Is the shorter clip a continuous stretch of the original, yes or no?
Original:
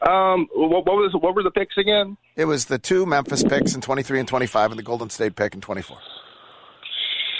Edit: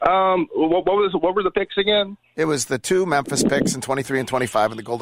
yes